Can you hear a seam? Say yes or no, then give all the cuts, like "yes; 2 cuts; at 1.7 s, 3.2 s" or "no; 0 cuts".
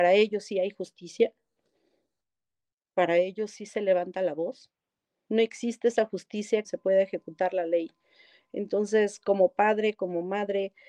yes; 2 cuts; at 5.2 s, 6.6 s